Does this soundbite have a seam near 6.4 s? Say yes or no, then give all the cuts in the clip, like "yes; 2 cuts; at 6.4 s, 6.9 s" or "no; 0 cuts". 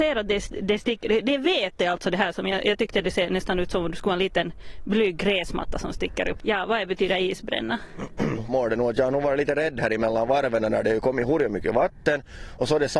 yes; 2 cuts; at 6.4 s, 8.5 s